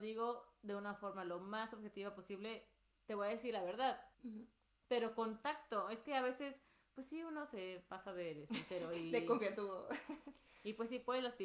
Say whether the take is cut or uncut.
cut